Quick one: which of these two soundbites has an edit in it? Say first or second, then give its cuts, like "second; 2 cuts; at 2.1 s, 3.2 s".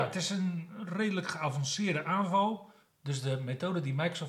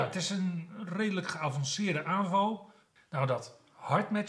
second; 1 cut; at 3.0 s